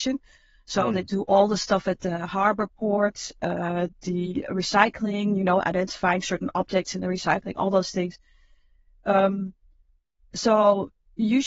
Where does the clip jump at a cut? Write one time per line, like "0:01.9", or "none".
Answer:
none

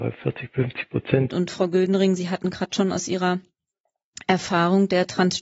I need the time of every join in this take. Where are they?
0:01.3

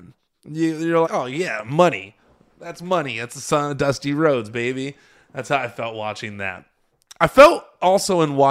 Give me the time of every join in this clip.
0:01.0

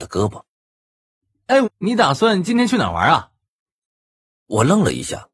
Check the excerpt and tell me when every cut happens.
0:01.6

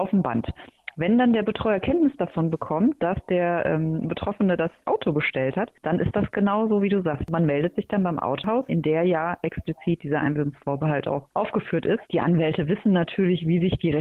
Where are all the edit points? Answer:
0:08.7
0:12.1

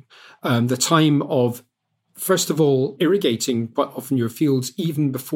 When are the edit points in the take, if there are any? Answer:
none

